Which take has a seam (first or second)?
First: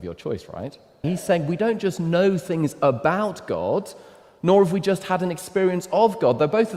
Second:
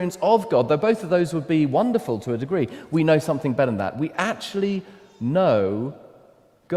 first